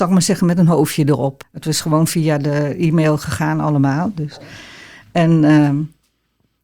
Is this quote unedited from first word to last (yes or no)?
no